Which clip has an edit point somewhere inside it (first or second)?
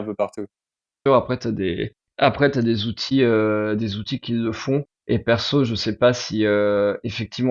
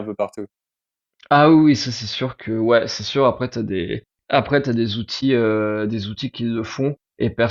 first